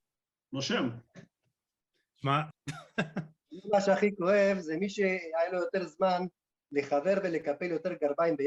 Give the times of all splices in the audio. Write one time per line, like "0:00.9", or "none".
0:02.5